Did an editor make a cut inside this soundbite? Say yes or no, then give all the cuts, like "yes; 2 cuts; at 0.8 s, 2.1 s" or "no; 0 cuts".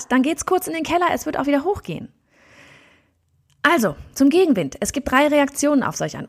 no; 0 cuts